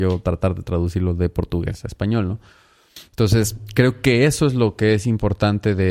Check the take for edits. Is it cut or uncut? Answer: uncut